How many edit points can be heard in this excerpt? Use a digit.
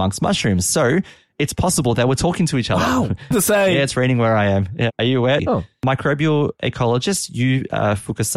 2